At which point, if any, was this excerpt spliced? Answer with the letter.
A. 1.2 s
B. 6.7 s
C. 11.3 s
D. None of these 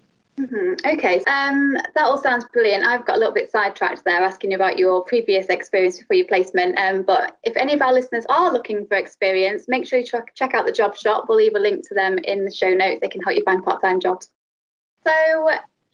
A